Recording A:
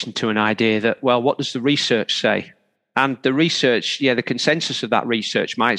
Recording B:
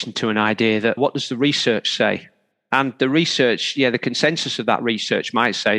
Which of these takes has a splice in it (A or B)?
B